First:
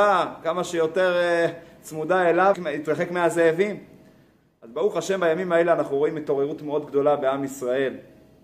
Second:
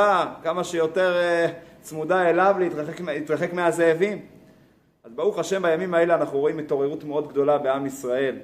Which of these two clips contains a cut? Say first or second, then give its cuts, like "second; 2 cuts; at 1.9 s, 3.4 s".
first; 1 cut; at 2.5 s